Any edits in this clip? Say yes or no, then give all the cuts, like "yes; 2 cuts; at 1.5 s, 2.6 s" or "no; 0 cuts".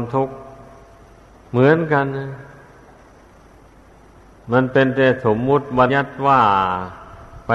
yes; 1 cut; at 5.9 s